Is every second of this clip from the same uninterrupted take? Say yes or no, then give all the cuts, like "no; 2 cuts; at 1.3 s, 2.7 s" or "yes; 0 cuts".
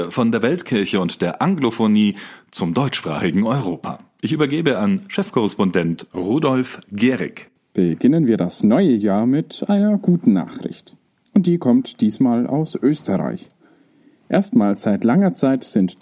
yes; 0 cuts